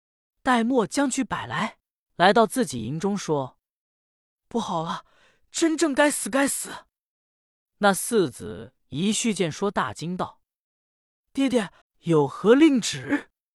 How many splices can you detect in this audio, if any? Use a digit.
2